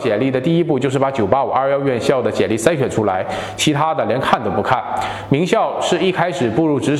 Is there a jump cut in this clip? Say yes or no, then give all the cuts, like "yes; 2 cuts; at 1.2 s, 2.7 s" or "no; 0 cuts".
no; 0 cuts